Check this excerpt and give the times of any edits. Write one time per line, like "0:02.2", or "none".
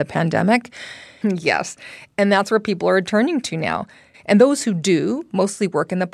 0:01.2
0:04.1